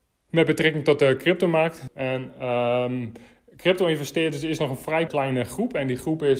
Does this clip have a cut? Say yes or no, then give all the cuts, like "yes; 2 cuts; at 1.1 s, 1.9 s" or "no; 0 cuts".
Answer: yes; 2 cuts; at 1.9 s, 5.1 s